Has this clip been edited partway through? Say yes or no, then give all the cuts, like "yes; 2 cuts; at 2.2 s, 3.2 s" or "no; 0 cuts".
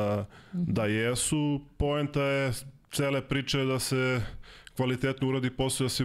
no; 0 cuts